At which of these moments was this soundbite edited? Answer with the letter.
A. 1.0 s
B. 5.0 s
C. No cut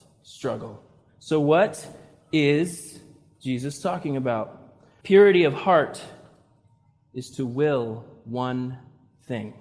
B